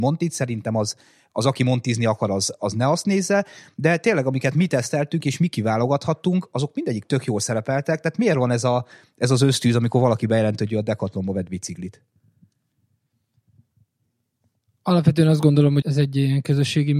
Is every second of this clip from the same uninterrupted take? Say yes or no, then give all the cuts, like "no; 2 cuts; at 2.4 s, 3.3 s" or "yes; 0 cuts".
no; 1 cut; at 15.8 s